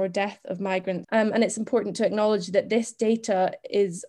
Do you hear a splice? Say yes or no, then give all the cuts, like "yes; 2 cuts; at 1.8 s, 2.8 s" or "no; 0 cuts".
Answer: yes; 1 cut; at 1.0 s